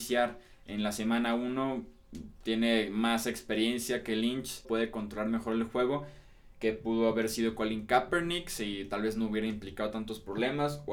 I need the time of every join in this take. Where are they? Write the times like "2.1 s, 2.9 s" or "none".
4.6 s, 6.5 s